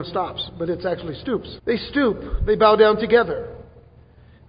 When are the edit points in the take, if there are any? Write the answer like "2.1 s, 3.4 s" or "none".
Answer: 1.6 s